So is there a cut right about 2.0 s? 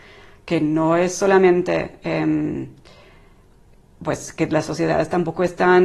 no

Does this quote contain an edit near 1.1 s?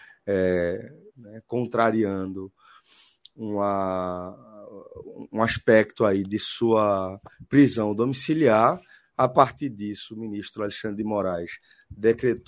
yes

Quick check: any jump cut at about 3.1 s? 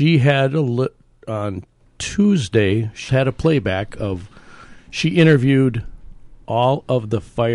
yes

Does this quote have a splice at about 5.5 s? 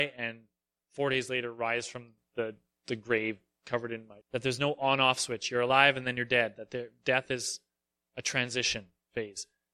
no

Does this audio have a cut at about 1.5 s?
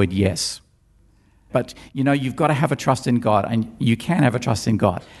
yes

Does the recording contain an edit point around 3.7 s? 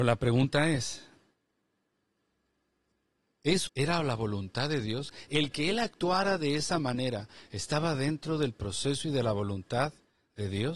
yes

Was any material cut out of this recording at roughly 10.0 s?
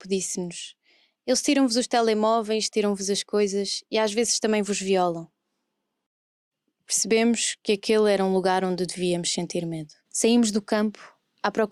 yes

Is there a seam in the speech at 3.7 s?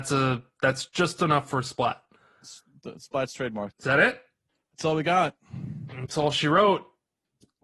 yes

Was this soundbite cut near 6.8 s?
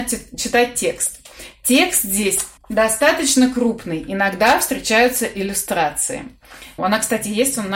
yes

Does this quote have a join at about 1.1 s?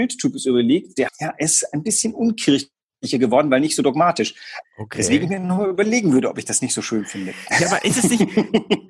yes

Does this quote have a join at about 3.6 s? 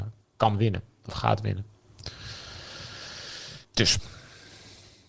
yes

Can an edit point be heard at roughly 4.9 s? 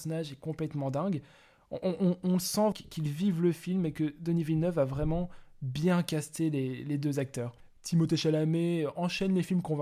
no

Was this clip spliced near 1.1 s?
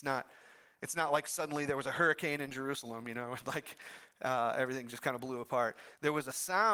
no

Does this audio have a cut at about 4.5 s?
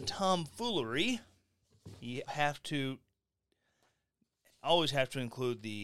no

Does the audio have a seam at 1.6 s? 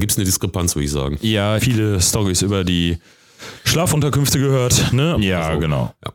yes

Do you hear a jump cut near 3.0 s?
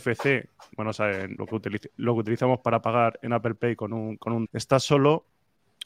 no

